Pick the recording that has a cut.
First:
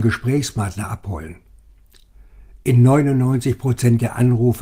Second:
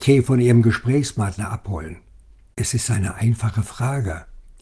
second; 1 cut; at 2.5 s

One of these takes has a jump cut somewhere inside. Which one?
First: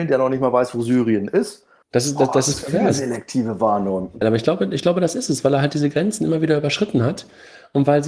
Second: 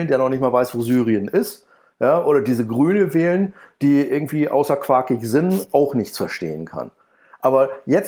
first; 2 cuts; at 1.8 s, 4.2 s

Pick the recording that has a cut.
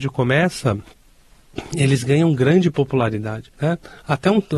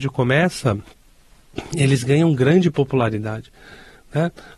first; 1 cut; at 3.5 s

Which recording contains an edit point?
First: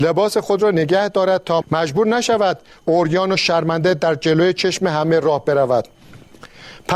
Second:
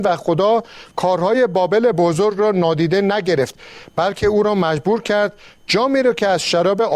first; 1 cut; at 1.6 s

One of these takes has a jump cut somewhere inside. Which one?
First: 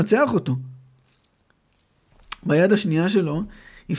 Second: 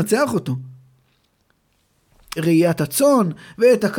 second; 1 cut; at 2.4 s

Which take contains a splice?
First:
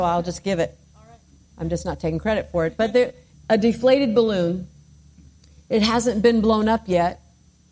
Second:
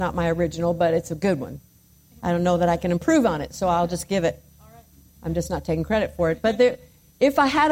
first; 1 cut; at 3.3 s

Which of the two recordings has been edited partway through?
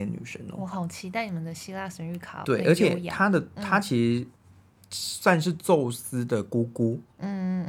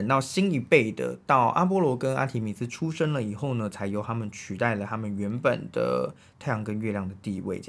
first; 1 cut; at 2.4 s

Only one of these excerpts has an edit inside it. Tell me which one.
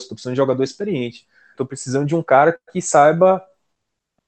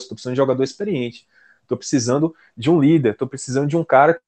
first; 2 cuts; at 1.5 s, 2.6 s

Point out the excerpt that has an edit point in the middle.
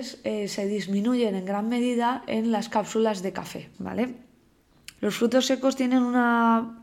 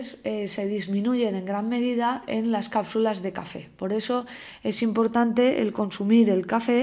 first; 2 cuts; at 3.7 s, 5.0 s

